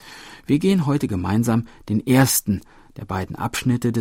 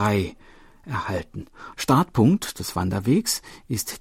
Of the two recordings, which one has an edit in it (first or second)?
second